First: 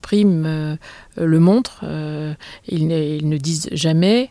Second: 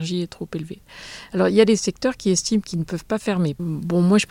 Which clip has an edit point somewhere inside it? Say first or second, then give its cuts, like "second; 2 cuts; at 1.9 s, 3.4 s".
second; 1 cut; at 2.6 s